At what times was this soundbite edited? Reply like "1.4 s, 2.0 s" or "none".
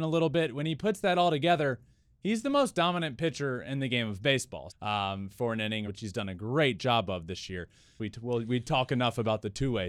4.7 s, 5.9 s, 8.0 s